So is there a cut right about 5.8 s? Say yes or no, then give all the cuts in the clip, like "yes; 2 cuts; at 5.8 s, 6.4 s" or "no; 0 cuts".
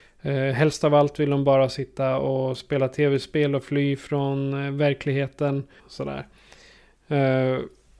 yes; 1 cut; at 5.8 s